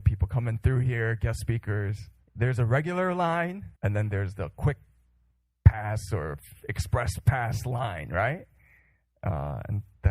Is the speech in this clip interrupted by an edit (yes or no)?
yes